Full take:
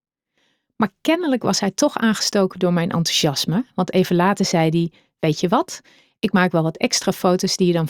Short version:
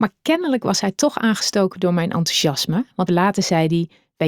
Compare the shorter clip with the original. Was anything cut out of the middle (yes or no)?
yes